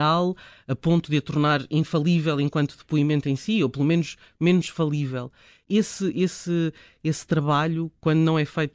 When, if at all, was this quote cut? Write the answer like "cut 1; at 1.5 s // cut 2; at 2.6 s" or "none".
none